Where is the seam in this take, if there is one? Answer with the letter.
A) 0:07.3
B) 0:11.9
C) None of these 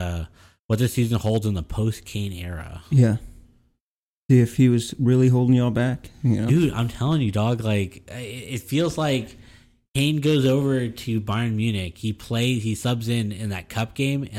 C